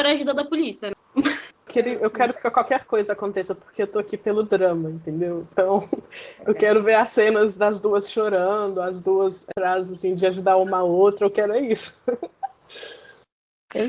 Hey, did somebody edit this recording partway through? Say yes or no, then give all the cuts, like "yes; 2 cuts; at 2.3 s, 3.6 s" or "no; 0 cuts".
no; 0 cuts